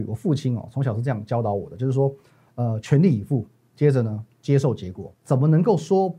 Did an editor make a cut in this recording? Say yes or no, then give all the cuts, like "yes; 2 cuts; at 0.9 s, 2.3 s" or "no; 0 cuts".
yes; 1 cut; at 5.1 s